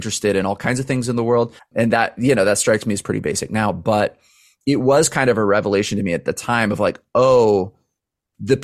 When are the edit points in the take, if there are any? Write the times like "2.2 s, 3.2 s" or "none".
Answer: 1.6 s